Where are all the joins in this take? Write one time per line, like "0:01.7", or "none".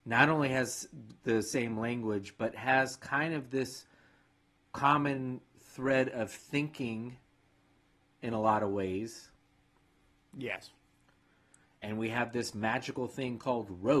0:11.6